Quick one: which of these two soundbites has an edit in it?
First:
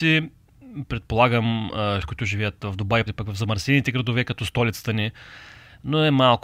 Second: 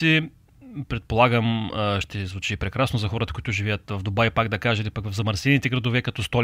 first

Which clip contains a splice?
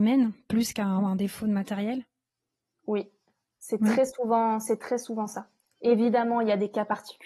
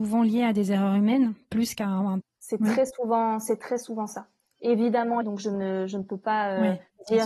second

